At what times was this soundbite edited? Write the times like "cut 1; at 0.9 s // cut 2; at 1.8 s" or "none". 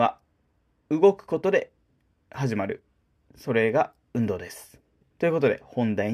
none